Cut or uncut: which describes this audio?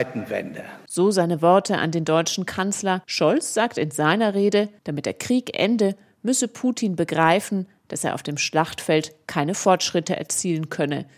cut